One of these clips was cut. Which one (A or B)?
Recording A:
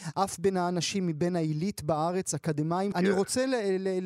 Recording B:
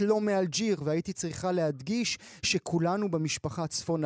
A